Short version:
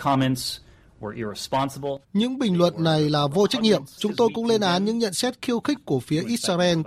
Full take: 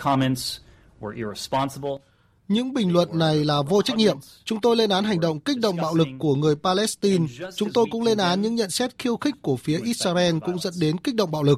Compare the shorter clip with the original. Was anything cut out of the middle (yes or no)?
yes